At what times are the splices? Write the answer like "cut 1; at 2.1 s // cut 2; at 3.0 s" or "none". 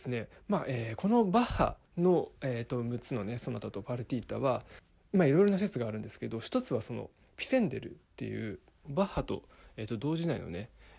cut 1; at 1.8 s

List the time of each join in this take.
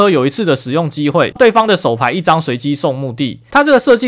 cut 1; at 1.3 s

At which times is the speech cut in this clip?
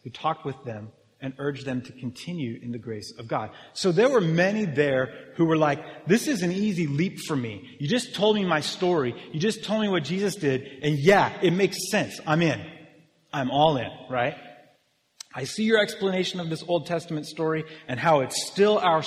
none

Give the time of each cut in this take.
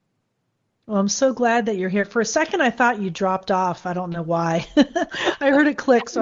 none

